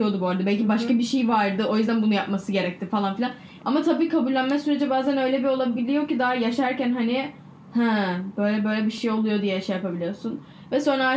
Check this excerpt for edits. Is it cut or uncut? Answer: cut